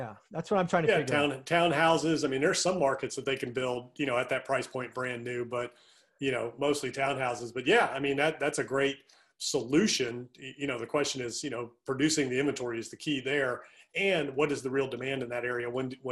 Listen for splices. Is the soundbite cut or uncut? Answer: uncut